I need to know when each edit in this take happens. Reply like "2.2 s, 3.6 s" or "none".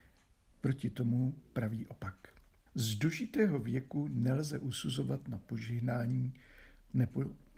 2.7 s